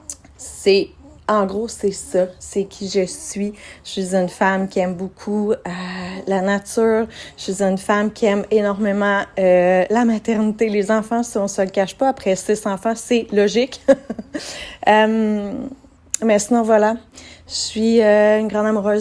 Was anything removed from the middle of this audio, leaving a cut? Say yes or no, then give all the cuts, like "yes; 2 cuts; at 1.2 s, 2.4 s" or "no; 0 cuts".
no; 0 cuts